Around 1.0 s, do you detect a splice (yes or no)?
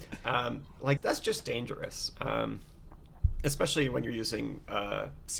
yes